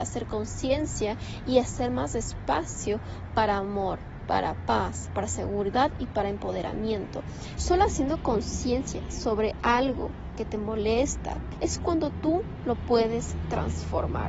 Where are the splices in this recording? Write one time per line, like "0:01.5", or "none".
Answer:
0:07.6
0:11.5